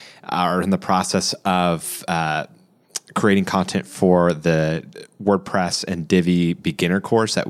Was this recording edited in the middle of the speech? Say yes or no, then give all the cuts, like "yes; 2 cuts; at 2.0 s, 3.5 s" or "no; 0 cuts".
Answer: no; 0 cuts